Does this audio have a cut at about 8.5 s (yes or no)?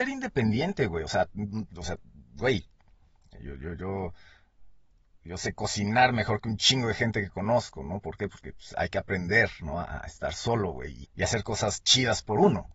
no